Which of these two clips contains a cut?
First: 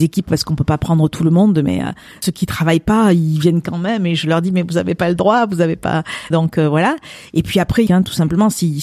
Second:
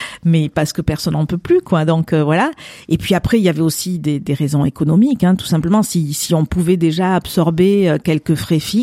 first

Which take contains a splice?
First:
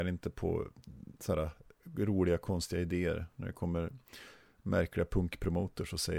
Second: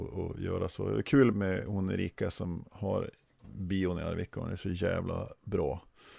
second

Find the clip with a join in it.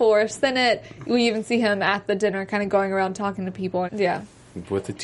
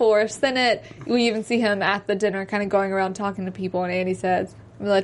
first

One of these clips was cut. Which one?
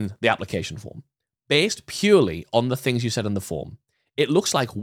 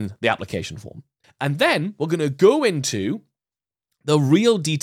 second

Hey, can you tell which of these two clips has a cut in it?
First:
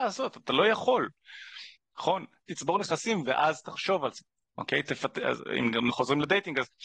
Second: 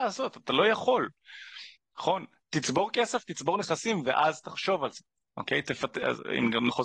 first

